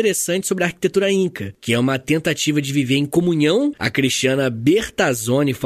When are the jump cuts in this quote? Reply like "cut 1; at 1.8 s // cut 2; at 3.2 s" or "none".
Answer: cut 1; at 3.7 s

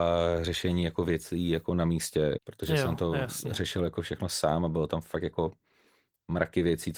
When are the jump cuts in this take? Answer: cut 1; at 2.4 s

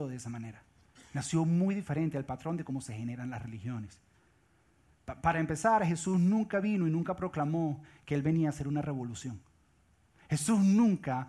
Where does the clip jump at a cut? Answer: none

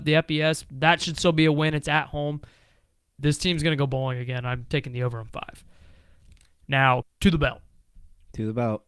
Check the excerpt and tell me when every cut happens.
cut 1; at 3.2 s // cut 2; at 7.0 s

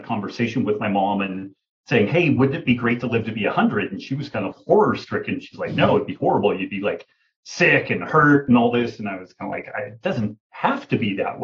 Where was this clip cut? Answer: cut 1; at 4.5 s

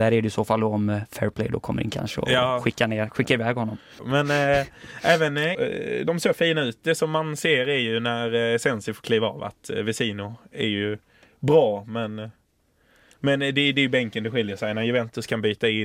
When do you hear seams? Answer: cut 1; at 4.0 s // cut 2; at 5.5 s

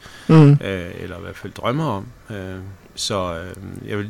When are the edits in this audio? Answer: none

